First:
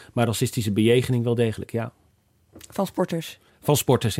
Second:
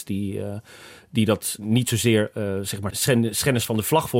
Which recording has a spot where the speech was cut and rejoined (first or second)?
second